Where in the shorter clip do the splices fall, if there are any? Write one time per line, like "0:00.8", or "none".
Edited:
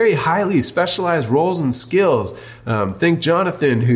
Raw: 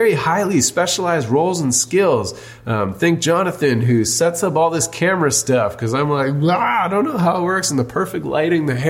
none